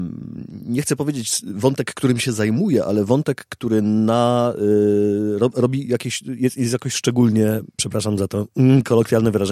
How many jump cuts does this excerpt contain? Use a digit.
0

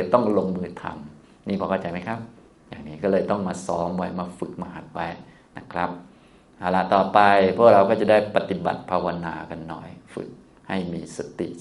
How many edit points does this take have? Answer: 0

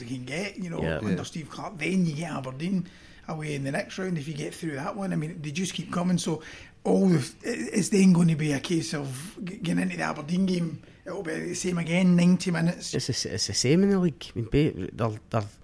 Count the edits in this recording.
1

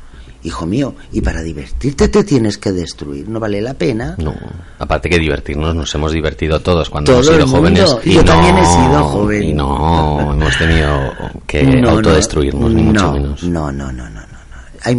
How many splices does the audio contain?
1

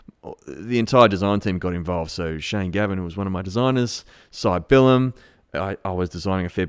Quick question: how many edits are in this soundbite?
0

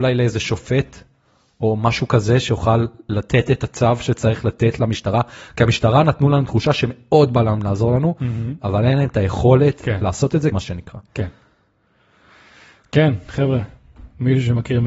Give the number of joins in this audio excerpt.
1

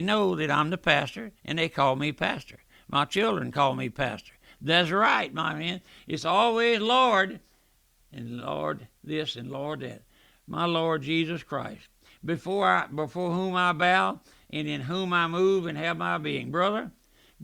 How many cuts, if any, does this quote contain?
0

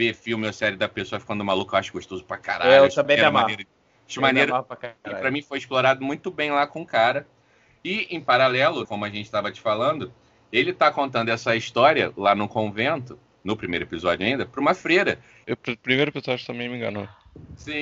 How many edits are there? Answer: 2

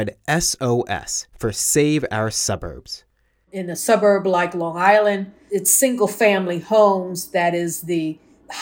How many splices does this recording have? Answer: 2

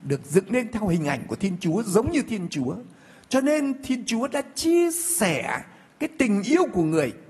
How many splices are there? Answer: 0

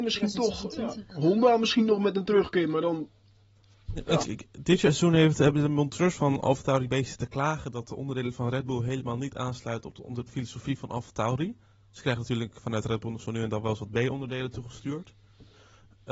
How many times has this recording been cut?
3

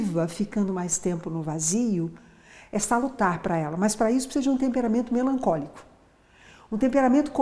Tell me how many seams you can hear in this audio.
0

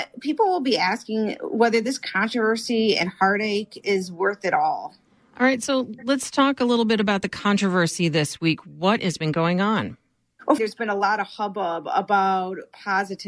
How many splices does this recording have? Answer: 1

